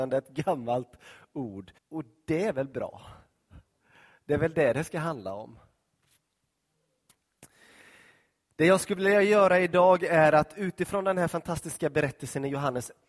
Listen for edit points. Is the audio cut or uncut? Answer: cut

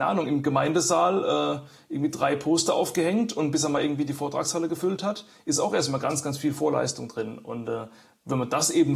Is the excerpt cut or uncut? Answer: uncut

